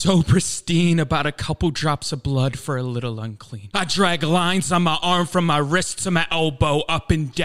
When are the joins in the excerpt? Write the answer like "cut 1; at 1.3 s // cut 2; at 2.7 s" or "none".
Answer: cut 1; at 3.7 s

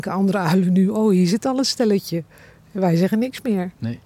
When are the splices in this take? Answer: none

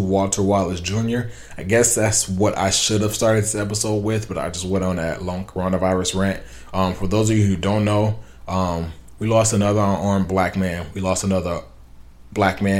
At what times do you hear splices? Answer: none

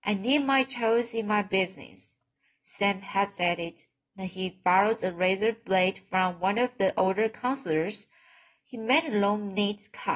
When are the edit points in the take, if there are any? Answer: none

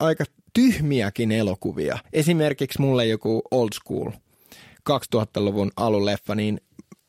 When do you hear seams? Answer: cut 1; at 2.0 s

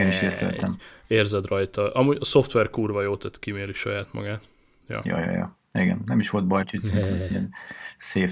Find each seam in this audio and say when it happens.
cut 1; at 6.6 s

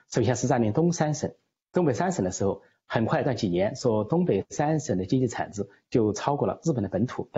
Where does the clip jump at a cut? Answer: cut 1; at 3.2 s

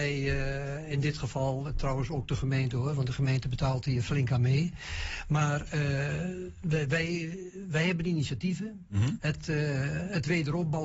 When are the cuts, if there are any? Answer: cut 1; at 9.2 s

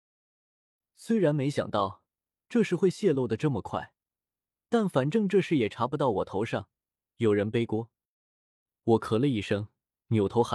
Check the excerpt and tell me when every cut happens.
none

